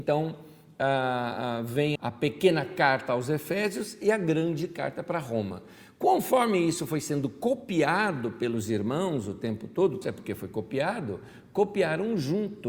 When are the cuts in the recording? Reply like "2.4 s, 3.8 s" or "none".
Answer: 2.0 s, 10.0 s